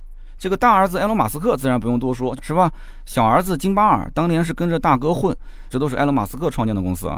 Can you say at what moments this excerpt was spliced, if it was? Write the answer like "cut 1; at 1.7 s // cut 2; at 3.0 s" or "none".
cut 1; at 2.4 s // cut 2; at 5.7 s